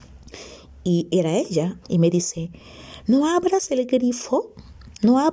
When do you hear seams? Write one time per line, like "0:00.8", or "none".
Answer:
0:01.8